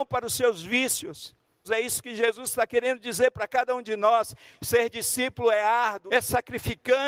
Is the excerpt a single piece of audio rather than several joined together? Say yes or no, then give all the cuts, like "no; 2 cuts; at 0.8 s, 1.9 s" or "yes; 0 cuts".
no; 2 cuts; at 1.6 s, 6.1 s